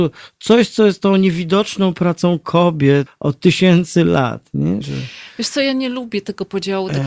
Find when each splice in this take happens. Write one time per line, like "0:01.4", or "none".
0:03.1
0:04.8